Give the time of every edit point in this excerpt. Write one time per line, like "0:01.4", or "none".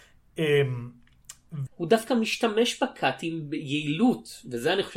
0:01.7